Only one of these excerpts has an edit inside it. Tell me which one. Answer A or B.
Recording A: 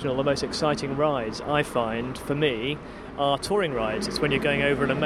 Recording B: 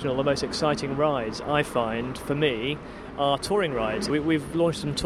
B